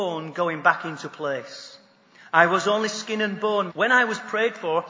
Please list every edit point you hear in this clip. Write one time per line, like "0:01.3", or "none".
0:02.3
0:03.7